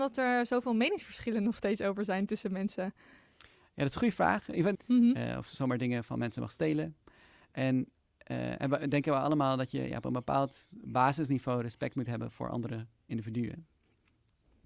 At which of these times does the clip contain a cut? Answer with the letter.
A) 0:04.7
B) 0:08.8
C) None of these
A